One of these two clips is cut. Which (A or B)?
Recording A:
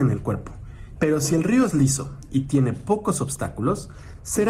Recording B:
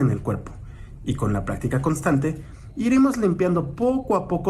A